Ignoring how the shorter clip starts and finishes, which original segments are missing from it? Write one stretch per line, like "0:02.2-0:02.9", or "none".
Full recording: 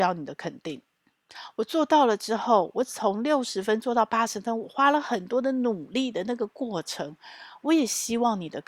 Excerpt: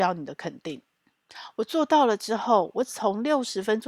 none